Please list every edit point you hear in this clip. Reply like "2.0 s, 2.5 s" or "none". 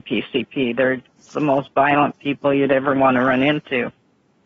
1.3 s

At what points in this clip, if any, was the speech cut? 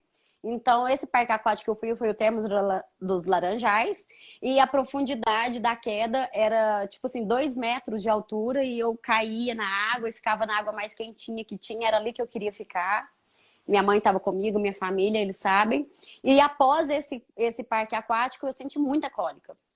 none

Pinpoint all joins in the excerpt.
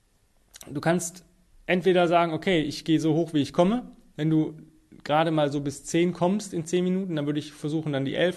none

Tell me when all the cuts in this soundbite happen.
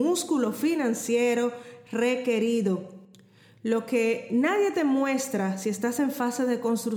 none

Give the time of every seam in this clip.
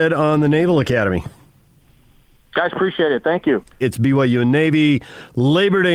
3.8 s

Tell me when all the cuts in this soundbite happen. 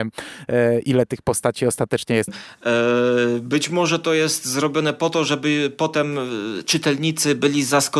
2.3 s

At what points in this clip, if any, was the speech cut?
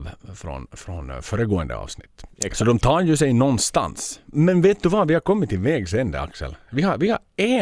2.3 s

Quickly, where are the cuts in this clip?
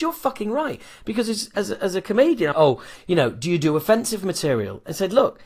2.5 s

